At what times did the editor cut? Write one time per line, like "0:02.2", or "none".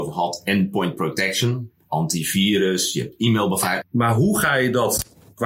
0:03.8